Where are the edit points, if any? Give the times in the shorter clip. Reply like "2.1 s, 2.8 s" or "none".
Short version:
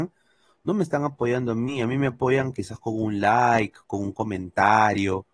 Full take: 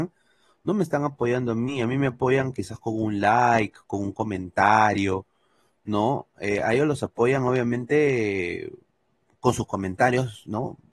none